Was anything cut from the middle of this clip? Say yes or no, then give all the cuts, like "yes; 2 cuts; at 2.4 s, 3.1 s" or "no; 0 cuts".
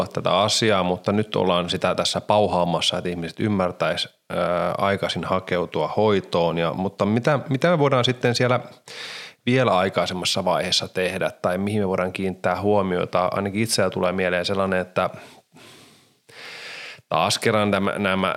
no; 0 cuts